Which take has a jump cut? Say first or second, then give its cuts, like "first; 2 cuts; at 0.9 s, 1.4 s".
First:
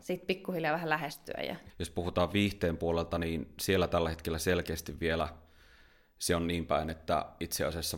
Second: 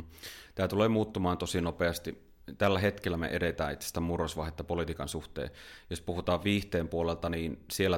first; 1 cut; at 1.7 s